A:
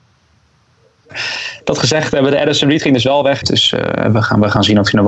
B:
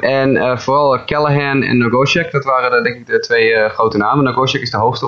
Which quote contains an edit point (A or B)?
A